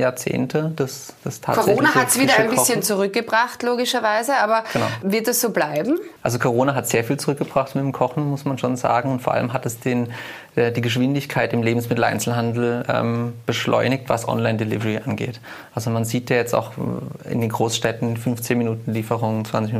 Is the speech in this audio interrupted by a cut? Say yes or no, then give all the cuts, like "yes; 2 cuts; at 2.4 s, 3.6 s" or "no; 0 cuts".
yes; 1 cut; at 6.2 s